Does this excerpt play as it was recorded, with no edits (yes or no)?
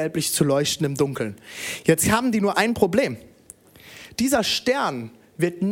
yes